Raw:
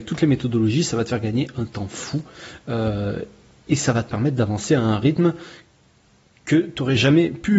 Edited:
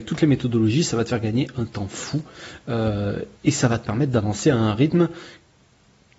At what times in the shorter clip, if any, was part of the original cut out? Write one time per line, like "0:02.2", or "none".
0:03.3